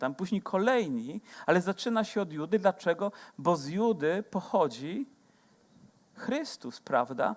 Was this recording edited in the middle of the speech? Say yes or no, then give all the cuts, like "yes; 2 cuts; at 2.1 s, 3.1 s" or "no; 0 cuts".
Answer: no; 0 cuts